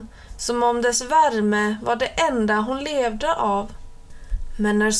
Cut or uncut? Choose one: uncut